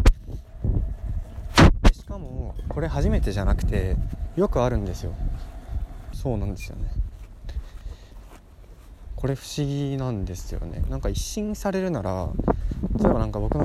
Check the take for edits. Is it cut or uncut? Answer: cut